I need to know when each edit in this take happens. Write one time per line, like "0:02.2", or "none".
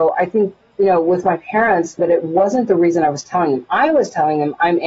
0:02.0